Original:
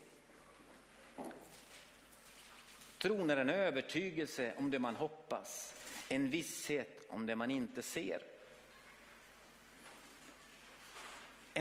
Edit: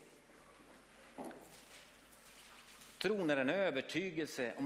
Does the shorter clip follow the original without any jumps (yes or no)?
yes